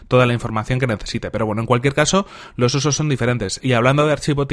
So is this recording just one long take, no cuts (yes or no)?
no